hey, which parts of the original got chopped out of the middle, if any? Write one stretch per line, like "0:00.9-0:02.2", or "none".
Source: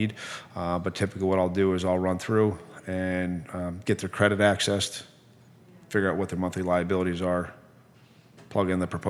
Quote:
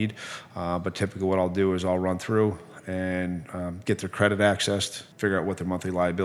0:05.1-0:05.8